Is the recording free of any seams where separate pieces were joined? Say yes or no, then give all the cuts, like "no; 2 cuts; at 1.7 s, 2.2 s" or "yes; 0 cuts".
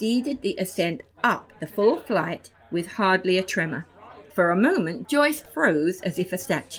no; 1 cut; at 4.3 s